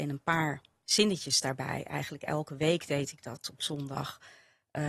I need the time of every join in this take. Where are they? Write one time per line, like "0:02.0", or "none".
none